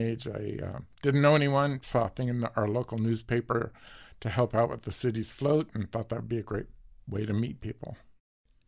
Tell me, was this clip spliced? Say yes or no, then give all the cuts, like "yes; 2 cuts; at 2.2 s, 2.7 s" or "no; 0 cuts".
no; 0 cuts